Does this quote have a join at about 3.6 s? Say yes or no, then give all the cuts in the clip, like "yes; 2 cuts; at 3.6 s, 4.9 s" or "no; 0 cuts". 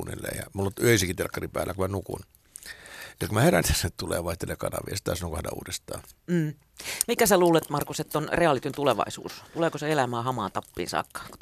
yes; 1 cut; at 3.6 s